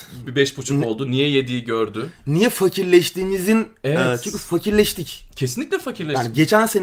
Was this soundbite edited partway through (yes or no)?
no